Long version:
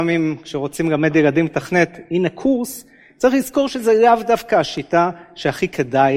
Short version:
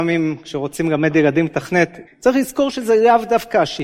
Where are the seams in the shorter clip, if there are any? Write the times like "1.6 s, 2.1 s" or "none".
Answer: 2.1 s